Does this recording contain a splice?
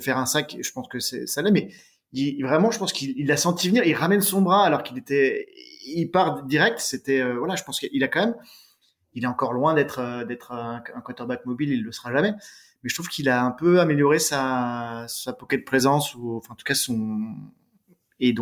no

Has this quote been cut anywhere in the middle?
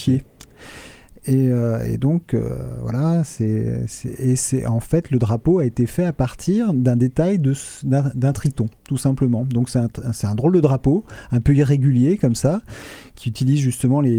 no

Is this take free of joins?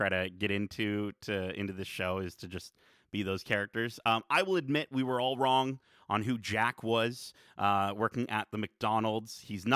yes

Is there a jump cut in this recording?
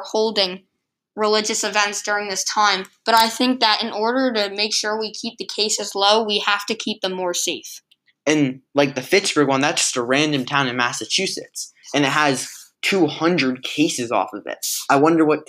no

